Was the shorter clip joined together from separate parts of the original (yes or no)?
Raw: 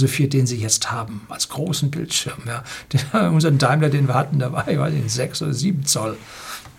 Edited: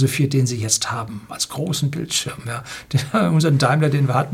no